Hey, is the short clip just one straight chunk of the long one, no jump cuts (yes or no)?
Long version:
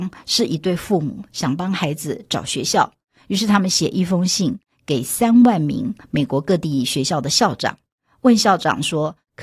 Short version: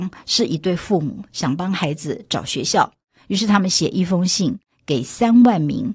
yes